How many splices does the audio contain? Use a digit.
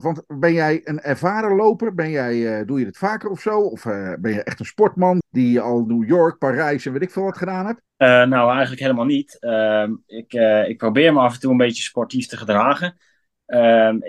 2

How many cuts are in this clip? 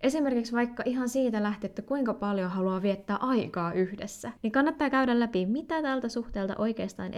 1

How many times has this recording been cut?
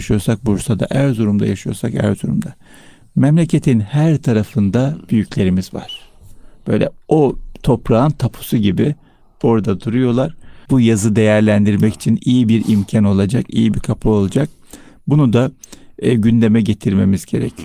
1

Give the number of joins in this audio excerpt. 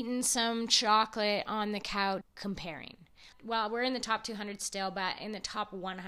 2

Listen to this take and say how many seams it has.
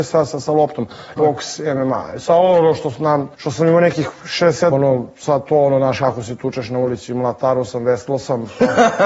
3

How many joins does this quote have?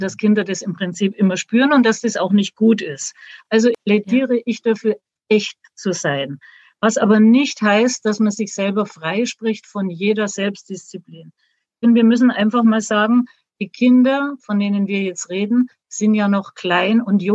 0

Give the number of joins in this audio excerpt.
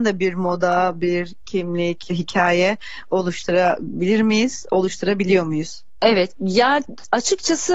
1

